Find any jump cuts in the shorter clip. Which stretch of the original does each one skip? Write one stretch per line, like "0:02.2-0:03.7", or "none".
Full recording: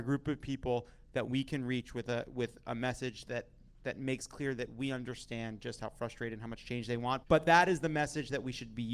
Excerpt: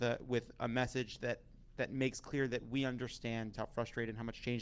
0:05.6-0:05.8